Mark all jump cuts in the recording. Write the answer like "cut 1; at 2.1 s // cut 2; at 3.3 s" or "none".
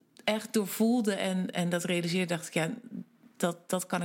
cut 1; at 1.5 s